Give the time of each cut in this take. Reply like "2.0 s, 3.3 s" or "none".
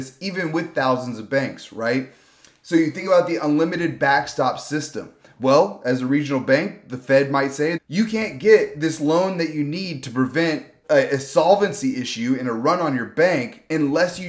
7.8 s, 10.8 s